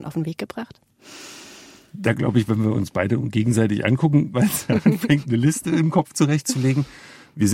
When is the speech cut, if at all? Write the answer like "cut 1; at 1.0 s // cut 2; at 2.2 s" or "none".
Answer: cut 1; at 4.3 s